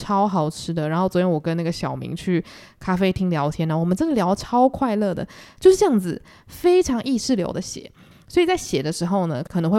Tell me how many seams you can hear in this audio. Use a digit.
1